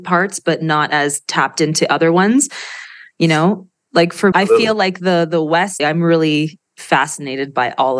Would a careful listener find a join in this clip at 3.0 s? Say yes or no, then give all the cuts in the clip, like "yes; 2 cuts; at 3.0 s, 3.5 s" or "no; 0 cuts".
no; 2 cuts; at 4.3 s, 5.8 s